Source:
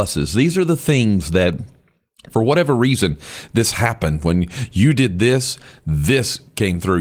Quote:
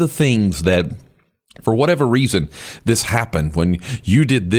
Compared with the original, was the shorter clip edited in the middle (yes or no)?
no